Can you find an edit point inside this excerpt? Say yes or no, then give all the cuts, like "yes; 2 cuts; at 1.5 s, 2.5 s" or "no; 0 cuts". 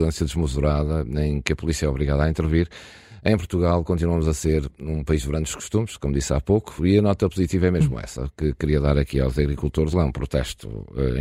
yes; 2 cuts; at 6.8 s, 9.9 s